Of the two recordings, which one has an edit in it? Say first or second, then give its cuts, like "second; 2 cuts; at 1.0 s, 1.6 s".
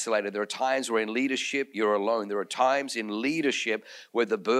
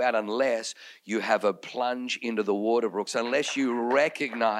second; 1 cut; at 3.1 s